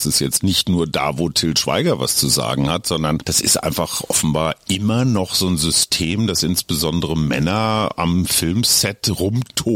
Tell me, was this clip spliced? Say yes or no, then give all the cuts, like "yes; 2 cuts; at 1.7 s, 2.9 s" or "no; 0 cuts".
no; 0 cuts